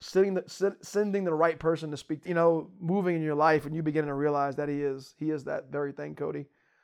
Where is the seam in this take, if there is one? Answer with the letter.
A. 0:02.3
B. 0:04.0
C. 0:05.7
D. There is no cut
A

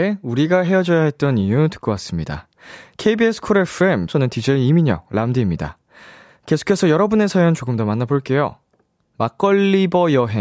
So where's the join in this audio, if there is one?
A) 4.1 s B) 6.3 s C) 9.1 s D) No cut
A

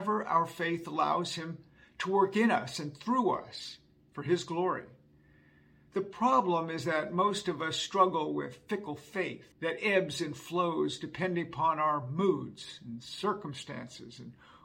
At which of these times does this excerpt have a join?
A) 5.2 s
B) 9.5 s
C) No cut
B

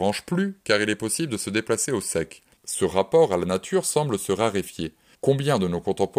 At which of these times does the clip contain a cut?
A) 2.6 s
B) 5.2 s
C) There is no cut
A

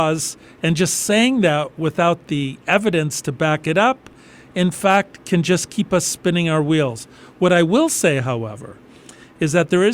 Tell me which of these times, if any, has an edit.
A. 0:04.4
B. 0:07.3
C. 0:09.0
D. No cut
D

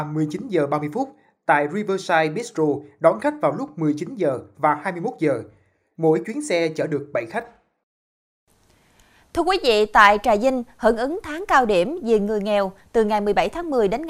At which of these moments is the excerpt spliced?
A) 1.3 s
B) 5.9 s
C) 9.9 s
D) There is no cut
B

